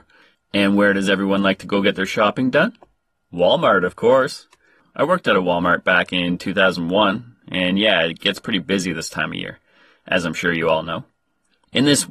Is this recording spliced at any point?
no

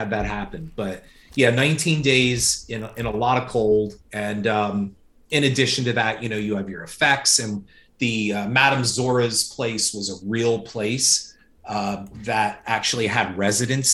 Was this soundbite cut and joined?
yes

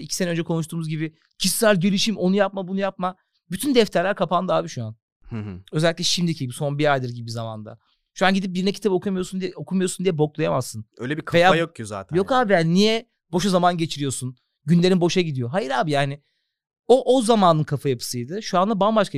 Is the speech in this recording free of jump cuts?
no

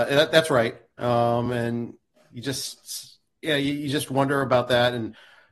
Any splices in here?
no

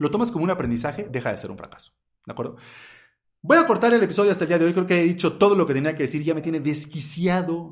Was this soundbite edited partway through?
no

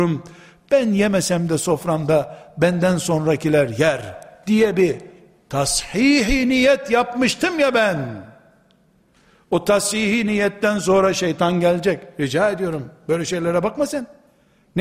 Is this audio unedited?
yes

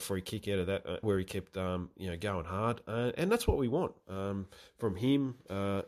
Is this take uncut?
no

